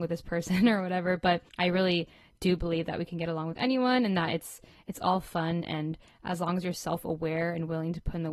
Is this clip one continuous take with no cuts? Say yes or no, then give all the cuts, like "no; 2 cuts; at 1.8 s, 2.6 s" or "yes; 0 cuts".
no; 1 cut; at 1.5 s